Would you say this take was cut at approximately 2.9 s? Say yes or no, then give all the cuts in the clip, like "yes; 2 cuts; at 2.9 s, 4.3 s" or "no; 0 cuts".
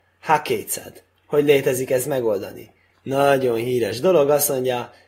yes; 1 cut; at 2.9 s